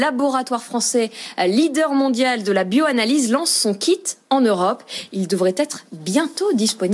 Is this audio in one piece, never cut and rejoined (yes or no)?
yes